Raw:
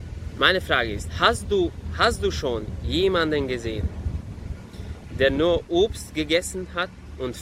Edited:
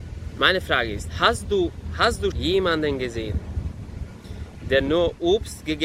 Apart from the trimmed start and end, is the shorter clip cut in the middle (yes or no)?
yes